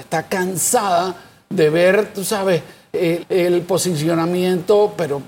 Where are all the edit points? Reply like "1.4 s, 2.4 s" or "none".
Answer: 3.2 s